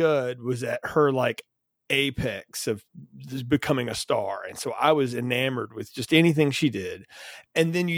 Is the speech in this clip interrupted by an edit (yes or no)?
no